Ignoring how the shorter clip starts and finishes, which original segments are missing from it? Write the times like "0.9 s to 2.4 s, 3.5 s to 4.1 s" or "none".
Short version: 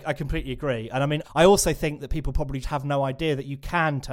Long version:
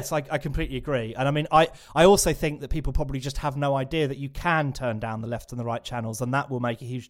1.5 s to 1.8 s, 3.2 s to 3.3 s